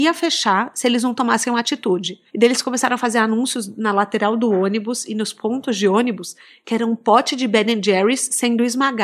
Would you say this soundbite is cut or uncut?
cut